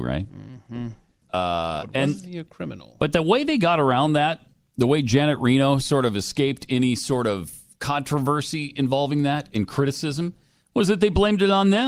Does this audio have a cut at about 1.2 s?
yes; 1 cut; at 1.2 s

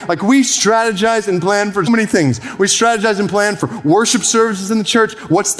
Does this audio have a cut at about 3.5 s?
no; 1 cut; at 1.9 s

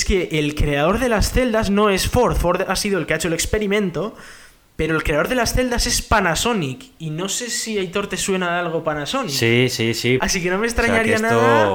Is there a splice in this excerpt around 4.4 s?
no; 1 cut; at 10.2 s

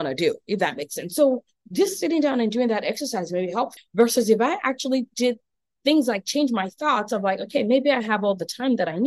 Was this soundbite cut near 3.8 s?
yes; 1 cut; at 3.8 s

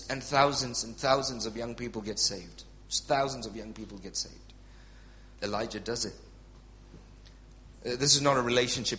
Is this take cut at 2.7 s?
no; 2 cuts; at 5.4 s, 7.7 s

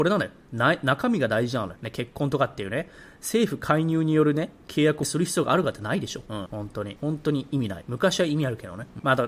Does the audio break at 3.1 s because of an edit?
no; 0 cuts

